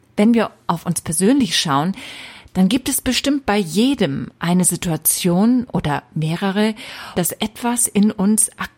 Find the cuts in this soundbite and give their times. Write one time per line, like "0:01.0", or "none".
0:07.2